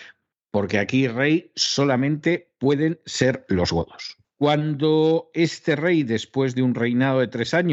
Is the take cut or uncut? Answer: cut